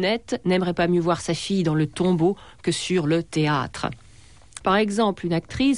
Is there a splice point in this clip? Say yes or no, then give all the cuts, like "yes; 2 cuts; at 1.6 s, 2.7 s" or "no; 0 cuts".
yes; 1 cut; at 4.6 s